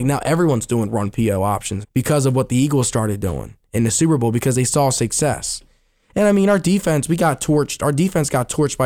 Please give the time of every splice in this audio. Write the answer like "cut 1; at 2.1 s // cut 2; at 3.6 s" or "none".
cut 1; at 1.8 s

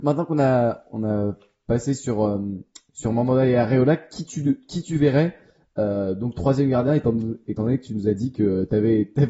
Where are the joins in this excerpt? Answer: none

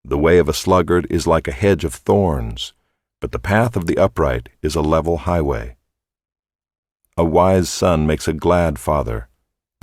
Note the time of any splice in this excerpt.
none

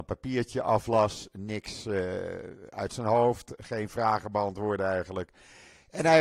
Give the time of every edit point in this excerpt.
none

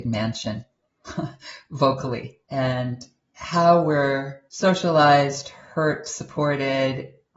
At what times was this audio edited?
cut 1; at 2.4 s // cut 2; at 4.5 s

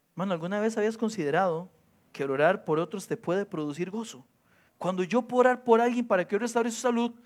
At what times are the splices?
cut 1; at 4.7 s

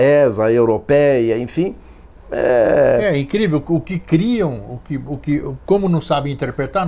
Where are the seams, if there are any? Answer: none

